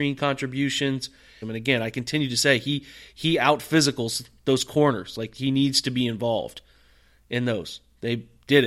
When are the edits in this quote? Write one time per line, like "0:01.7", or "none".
0:01.4